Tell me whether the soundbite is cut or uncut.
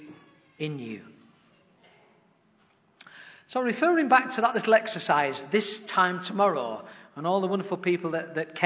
uncut